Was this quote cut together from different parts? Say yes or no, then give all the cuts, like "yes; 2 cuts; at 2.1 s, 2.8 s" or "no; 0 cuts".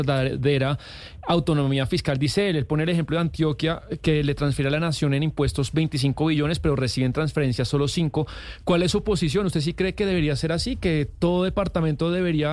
no; 0 cuts